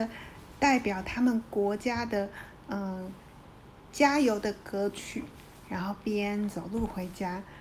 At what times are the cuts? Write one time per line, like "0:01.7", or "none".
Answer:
none